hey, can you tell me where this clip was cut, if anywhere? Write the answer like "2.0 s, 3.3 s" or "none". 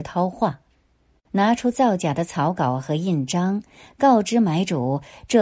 1.3 s